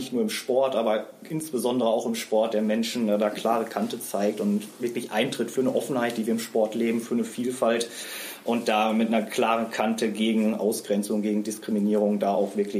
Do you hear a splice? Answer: no; 0 cuts

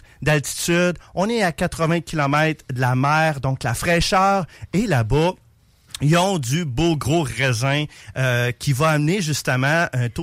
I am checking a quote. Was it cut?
no; 0 cuts

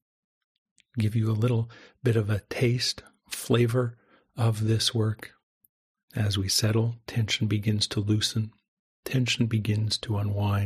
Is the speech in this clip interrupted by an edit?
yes; 1 cut; at 6.0 s

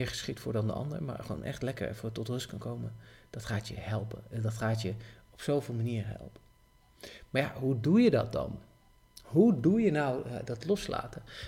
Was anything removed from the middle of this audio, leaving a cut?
no; 0 cuts

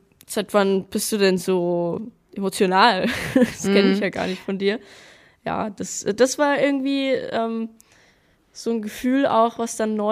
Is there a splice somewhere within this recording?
no; 0 cuts

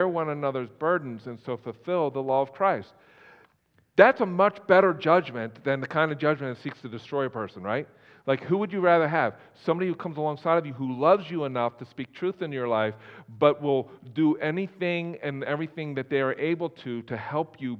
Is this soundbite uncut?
yes; 0 cuts

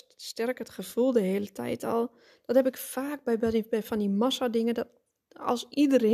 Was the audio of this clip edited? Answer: no; 0 cuts

